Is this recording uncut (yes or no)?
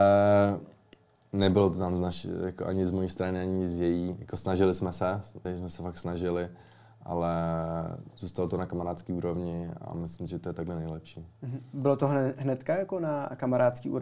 no